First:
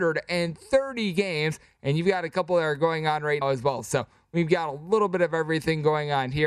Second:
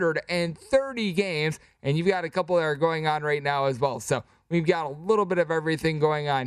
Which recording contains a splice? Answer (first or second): first